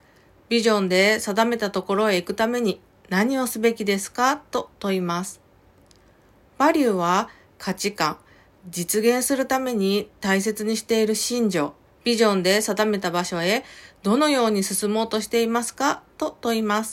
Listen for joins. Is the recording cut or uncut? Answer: cut